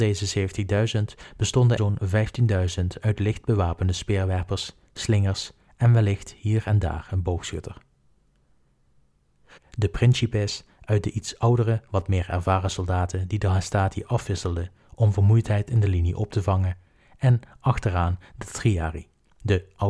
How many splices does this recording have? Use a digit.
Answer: 2